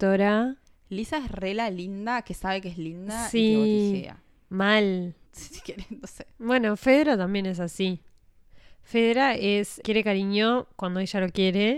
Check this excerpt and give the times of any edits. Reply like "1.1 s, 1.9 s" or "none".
5.3 s, 9.8 s